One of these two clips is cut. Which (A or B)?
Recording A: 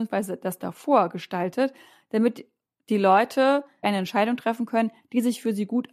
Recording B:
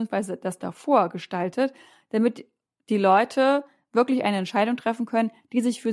A